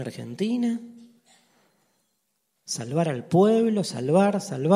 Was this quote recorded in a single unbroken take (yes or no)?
yes